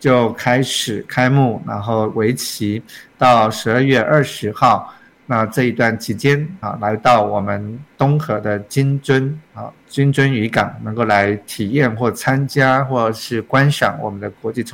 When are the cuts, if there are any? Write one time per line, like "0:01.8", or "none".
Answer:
0:06.6
0:09.8